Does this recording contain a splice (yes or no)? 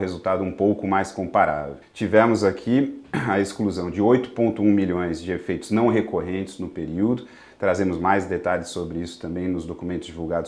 yes